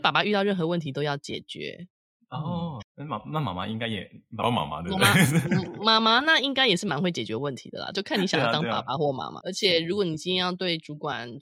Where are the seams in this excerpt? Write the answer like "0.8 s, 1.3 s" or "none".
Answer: 2.8 s, 9.4 s